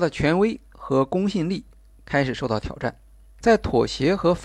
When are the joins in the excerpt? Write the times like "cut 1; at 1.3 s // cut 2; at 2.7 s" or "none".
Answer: cut 1; at 3.4 s